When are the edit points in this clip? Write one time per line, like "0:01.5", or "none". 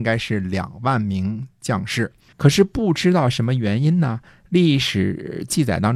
0:02.3